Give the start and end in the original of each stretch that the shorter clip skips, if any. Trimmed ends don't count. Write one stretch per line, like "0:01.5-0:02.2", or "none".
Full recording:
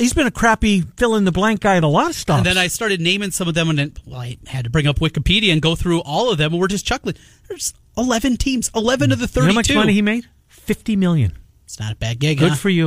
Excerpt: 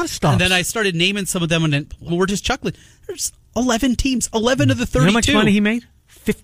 0:04.1-0:06.5